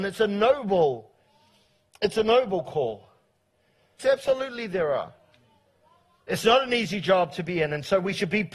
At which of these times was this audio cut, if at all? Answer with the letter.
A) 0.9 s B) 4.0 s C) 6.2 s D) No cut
B